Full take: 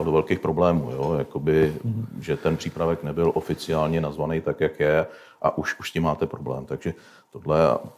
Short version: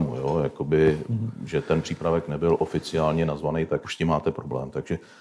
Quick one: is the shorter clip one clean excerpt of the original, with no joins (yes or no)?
no